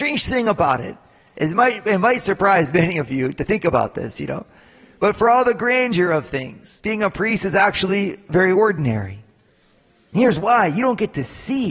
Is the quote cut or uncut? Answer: uncut